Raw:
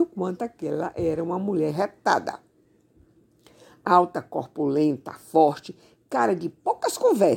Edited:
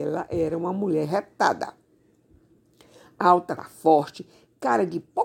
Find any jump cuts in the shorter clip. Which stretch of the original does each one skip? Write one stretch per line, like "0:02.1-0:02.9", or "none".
0:04.2-0:05.1